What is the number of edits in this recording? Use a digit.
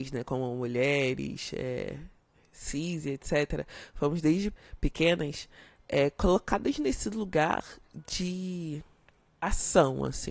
0